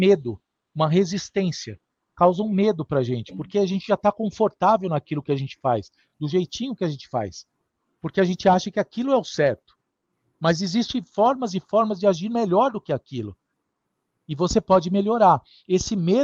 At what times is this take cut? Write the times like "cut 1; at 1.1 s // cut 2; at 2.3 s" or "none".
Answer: none